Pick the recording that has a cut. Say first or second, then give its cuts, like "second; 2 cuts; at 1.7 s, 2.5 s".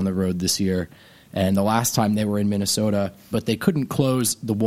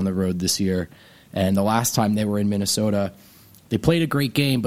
first; 1 cut; at 3.3 s